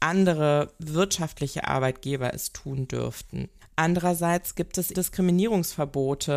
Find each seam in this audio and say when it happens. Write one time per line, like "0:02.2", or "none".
0:03.6
0:04.9